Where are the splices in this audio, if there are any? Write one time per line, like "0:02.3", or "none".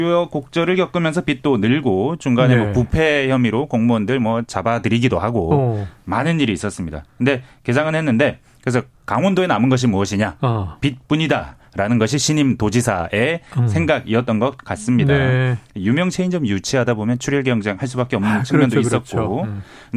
none